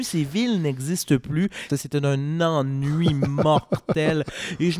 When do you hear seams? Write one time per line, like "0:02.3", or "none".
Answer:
0:01.7